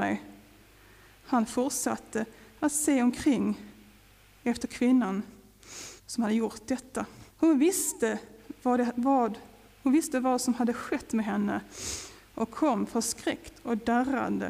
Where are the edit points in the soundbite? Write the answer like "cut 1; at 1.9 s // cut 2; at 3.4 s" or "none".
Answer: cut 1; at 6.0 s // cut 2; at 7.3 s